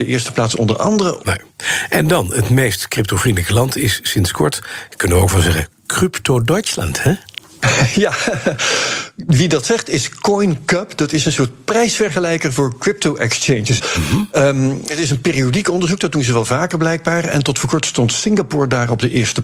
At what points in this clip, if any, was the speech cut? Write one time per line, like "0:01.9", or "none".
0:01.2
0:13.8